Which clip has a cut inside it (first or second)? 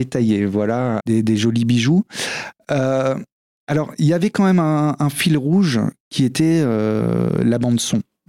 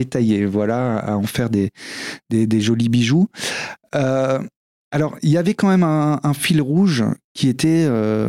first